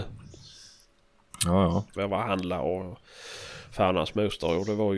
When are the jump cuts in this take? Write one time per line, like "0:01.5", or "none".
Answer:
0:02.0